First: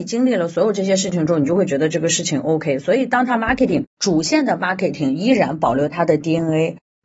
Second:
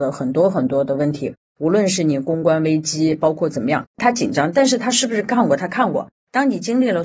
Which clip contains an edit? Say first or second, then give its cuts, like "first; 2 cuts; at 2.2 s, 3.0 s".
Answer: second; 1 cut; at 3.9 s